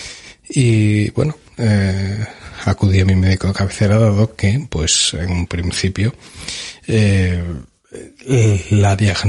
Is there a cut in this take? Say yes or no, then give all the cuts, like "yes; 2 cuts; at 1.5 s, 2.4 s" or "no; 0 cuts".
yes; 1 cut; at 1.4 s